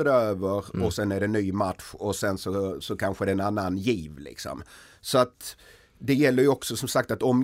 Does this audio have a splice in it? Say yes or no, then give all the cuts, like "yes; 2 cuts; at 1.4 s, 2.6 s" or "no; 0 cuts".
no; 0 cuts